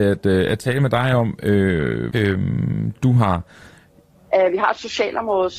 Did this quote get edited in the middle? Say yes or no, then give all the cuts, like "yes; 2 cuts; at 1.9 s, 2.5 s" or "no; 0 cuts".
yes; 2 cuts; at 2.1 s, 4.3 s